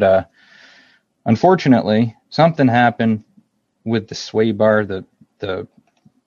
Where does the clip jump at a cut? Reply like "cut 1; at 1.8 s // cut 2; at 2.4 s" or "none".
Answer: cut 1; at 2.2 s